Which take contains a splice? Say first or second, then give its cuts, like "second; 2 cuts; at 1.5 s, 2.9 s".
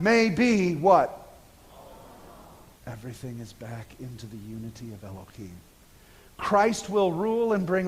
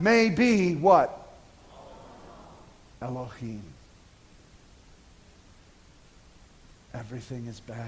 first; 1 cut; at 2.7 s